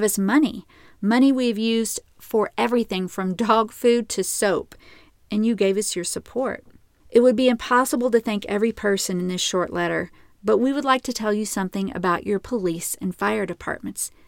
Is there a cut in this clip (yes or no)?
yes